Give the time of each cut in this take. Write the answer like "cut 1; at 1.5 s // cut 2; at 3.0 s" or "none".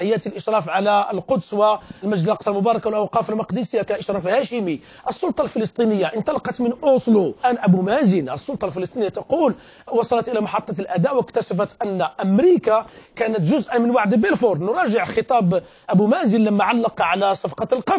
cut 1; at 7.4 s